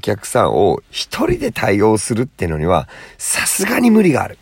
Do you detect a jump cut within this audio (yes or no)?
no